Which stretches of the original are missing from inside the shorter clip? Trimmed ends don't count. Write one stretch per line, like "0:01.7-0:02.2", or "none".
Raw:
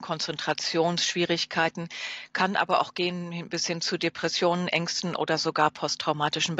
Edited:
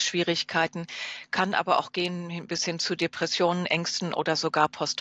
none